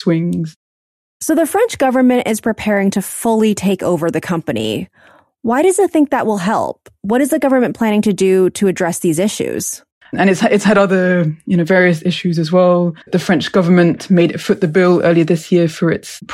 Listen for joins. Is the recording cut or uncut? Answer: cut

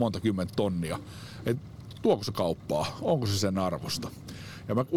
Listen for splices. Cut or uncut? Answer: uncut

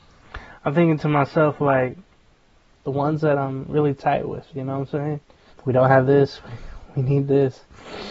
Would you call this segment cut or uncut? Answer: cut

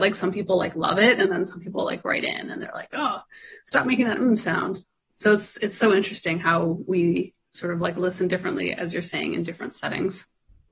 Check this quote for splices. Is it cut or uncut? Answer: uncut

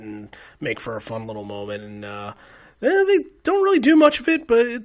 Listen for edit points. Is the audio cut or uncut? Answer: uncut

